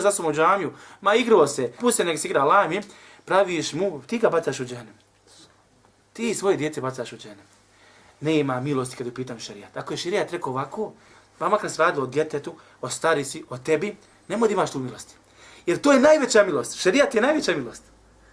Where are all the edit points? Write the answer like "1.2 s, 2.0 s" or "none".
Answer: 1.8 s